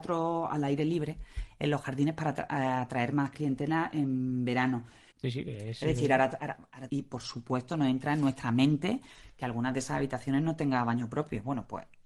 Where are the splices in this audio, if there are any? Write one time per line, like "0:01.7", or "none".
0:05.1
0:06.9